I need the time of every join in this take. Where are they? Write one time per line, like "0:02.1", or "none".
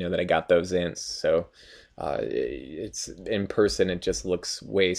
0:00.9